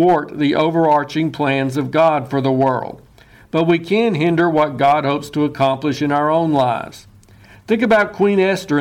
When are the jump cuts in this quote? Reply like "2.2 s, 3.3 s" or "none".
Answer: none